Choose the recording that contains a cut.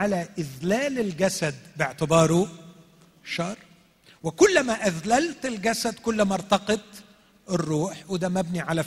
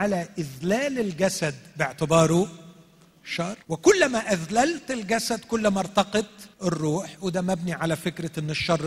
second; 2 cuts; at 3.6 s, 6.5 s

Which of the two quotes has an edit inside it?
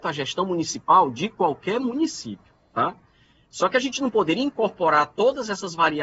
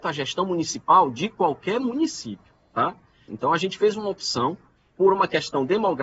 second; 1 cut; at 3.3 s

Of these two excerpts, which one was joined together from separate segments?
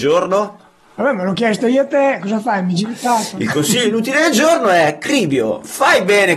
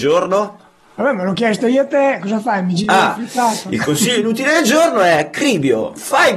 first; 1 cut; at 2.8 s

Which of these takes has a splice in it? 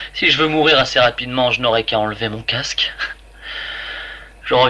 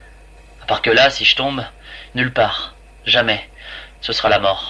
second; 1 cut; at 2.1 s

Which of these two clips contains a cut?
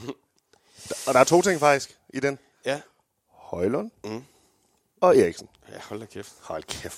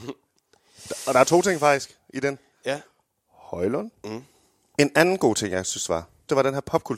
second; 1 cut; at 4.7 s

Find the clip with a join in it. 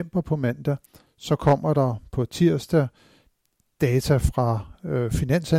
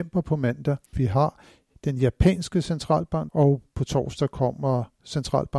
second; 2 cuts; at 0.9 s, 3.3 s

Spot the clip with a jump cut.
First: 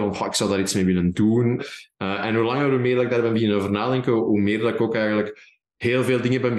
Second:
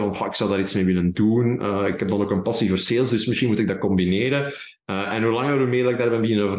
first; 1 cut; at 1.6 s

